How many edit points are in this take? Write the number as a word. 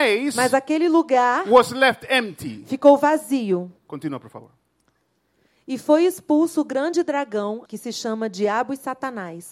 two